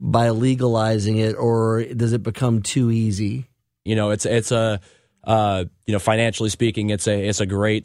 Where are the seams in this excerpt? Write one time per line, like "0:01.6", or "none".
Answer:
0:03.9